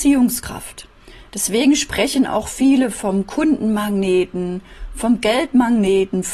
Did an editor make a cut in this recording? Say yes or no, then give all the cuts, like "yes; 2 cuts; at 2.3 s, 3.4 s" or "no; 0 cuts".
no; 0 cuts